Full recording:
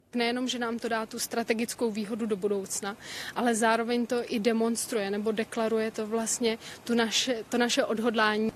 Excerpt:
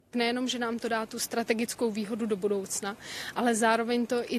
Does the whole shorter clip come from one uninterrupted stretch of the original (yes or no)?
yes